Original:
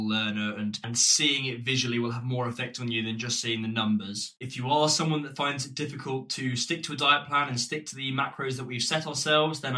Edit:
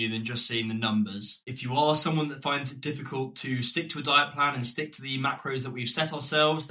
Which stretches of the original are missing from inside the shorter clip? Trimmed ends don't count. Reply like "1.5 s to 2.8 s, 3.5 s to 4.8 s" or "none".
none